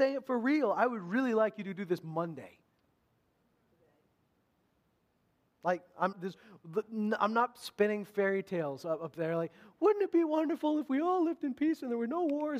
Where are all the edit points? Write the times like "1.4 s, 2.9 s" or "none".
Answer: 6.1 s